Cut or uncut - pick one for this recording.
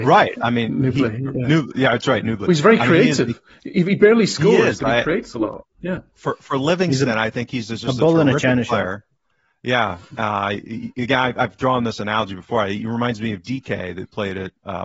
uncut